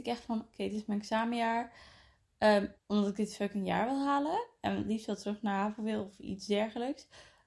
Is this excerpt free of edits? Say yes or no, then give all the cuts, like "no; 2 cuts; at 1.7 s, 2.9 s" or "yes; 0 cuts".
no; 1 cut; at 2.8 s